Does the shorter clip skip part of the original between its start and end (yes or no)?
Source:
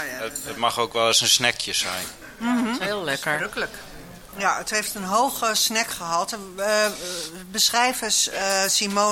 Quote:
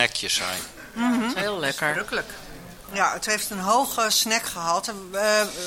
no